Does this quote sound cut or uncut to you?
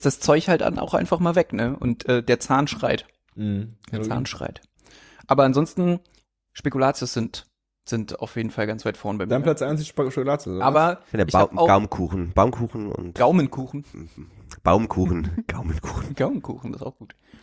uncut